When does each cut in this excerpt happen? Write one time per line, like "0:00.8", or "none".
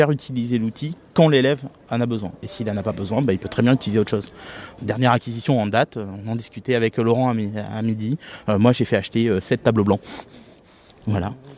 none